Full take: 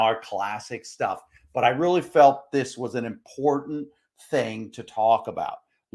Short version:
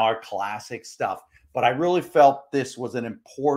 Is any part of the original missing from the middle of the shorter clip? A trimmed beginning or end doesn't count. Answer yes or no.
no